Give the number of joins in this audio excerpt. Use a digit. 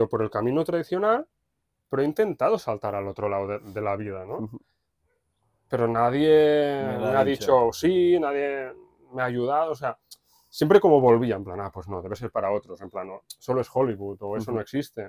0